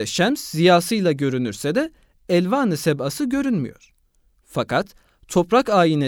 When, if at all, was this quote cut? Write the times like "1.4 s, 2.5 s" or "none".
none

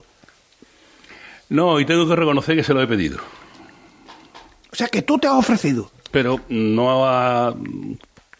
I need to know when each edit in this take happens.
5.9 s

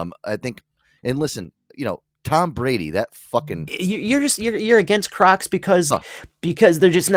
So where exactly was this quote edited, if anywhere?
3.7 s, 5.9 s

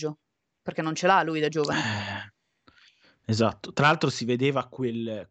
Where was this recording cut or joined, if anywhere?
none

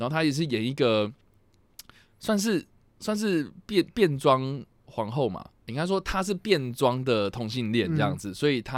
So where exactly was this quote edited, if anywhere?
none

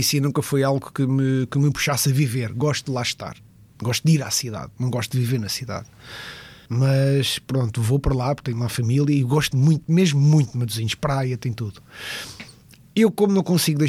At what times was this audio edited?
6.7 s

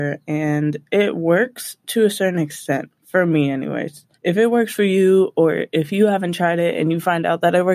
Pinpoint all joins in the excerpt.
3.0 s, 4.1 s

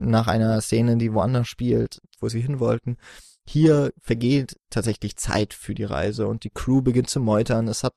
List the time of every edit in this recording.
2.2 s

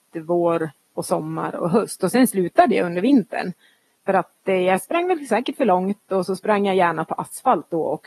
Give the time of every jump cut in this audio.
3.9 s

